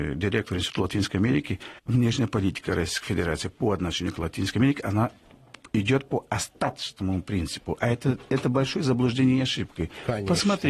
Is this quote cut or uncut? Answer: cut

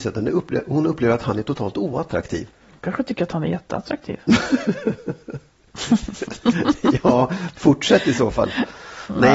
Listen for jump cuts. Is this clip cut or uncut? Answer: cut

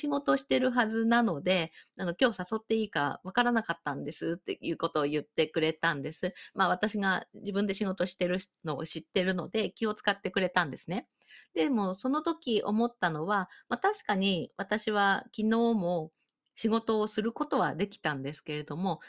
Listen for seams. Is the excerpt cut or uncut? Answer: uncut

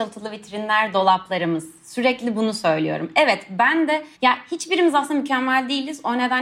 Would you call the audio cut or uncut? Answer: cut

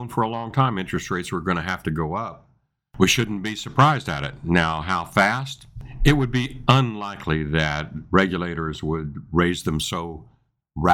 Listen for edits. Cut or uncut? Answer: uncut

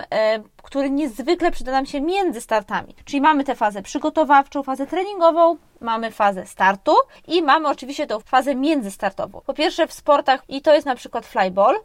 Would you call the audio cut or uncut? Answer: cut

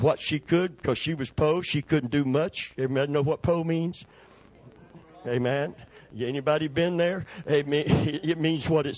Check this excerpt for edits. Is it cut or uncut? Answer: uncut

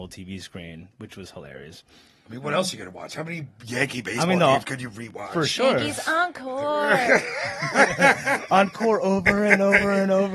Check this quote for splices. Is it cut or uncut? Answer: uncut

